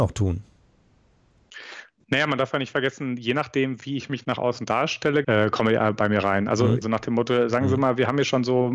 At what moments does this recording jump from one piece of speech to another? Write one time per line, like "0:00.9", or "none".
0:05.2
0:06.8